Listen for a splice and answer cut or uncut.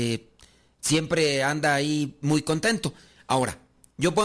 uncut